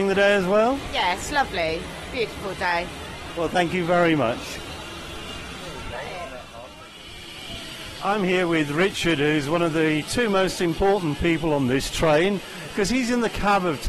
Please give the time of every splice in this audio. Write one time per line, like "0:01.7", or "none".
none